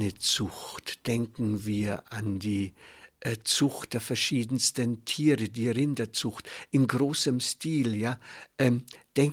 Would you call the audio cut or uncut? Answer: uncut